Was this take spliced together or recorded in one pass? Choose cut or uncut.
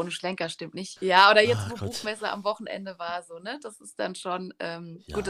cut